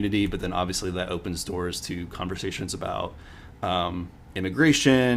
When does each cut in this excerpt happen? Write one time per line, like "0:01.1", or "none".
none